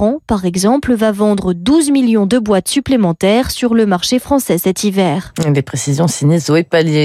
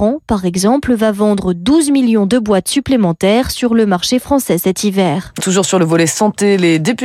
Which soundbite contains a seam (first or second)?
second